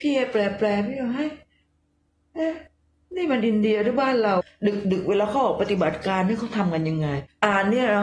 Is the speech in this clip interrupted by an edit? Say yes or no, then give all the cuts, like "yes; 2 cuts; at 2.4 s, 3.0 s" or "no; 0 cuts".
no; 0 cuts